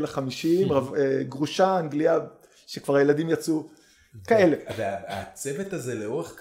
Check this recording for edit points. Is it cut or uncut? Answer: uncut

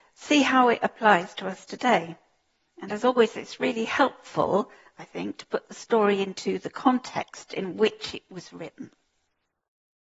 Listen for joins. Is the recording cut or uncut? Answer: uncut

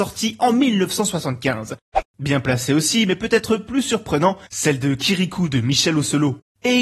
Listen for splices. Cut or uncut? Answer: cut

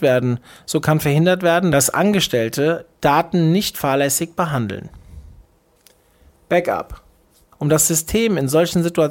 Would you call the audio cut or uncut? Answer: cut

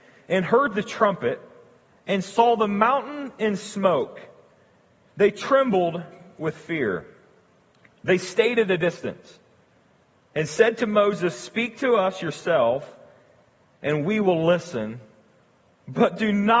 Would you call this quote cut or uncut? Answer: uncut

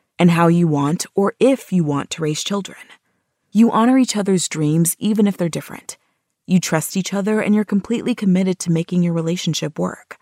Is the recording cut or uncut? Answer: uncut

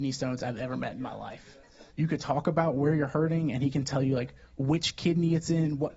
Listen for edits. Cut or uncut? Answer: cut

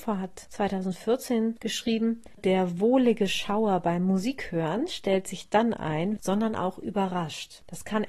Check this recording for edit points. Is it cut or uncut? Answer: cut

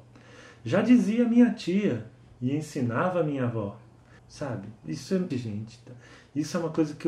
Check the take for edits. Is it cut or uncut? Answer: cut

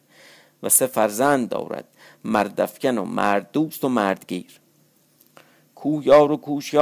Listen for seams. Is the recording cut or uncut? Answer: uncut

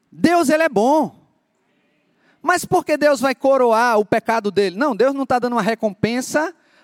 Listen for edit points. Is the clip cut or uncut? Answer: uncut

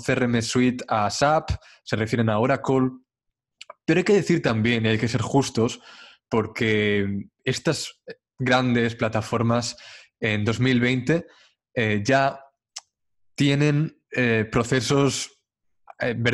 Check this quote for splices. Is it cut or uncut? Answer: uncut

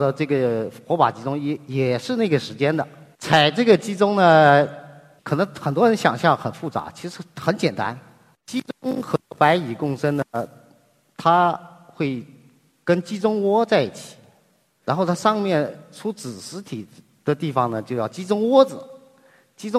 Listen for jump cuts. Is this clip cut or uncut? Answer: uncut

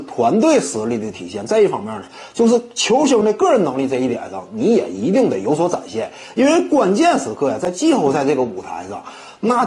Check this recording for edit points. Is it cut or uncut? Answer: uncut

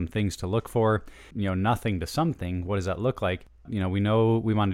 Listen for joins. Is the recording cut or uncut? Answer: cut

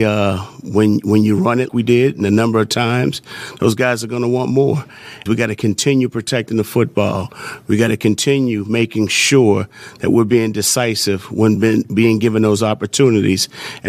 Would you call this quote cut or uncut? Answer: cut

